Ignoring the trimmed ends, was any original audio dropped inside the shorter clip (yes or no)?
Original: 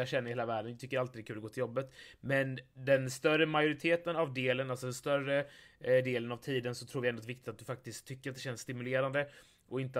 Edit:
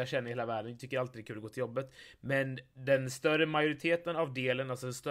no